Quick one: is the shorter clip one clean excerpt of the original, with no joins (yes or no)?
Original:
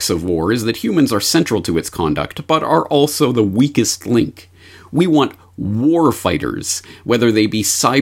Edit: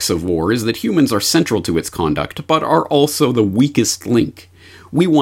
yes